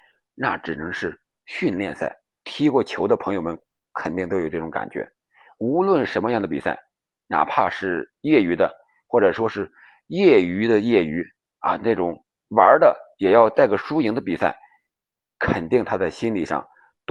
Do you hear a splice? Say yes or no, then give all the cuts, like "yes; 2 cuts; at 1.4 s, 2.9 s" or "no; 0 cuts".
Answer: yes; 1 cut; at 2.4 s